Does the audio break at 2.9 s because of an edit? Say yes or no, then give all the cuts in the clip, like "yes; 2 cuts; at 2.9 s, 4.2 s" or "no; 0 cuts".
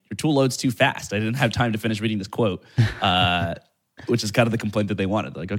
no; 0 cuts